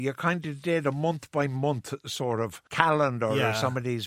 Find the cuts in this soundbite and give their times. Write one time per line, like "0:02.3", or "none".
0:02.7